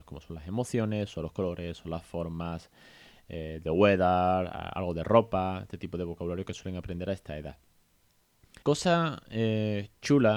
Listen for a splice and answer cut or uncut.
cut